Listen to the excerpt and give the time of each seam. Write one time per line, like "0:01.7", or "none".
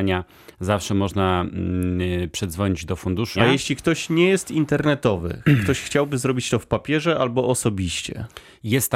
0:03.3